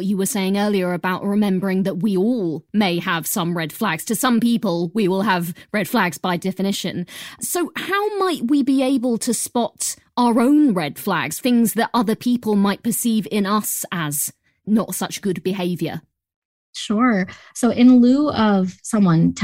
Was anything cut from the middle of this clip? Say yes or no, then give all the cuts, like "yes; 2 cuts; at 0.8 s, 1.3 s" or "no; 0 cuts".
no; 0 cuts